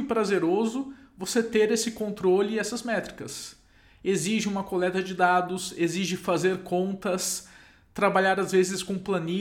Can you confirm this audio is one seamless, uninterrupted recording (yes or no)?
yes